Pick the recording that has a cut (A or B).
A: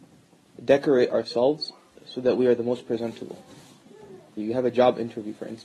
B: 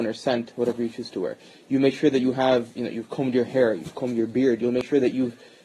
A